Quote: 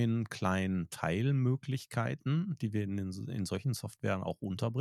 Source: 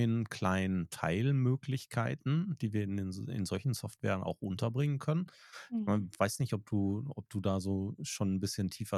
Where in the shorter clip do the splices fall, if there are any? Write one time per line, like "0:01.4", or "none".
none